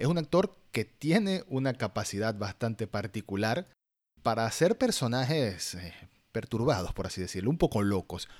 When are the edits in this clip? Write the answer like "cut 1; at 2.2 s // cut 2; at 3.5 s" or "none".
none